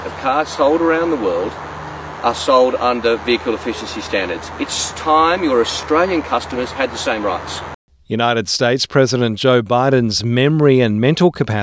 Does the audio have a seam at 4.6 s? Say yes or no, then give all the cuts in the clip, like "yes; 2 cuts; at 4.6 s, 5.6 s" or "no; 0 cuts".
no; 0 cuts